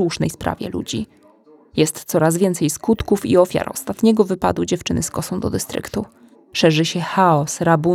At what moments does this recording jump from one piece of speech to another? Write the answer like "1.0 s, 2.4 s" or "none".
none